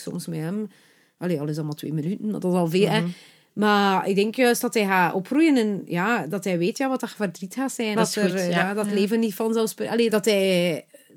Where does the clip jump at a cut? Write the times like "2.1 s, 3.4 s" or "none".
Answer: 8.0 s, 10.1 s